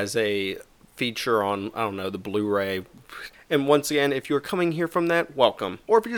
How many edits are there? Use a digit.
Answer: 1